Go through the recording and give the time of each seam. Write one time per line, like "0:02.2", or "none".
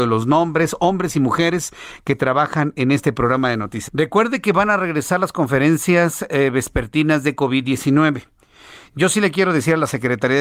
0:03.9